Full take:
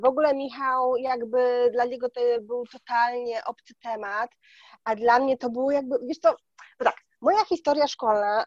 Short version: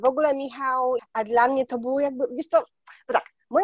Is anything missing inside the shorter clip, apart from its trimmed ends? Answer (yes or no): yes